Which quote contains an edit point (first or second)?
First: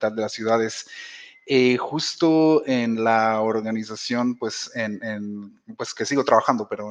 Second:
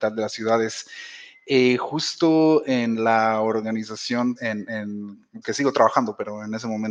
second